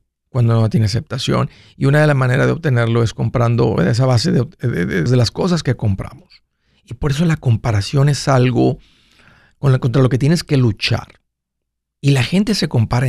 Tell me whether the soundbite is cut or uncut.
cut